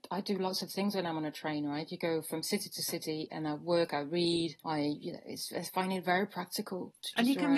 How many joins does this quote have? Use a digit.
1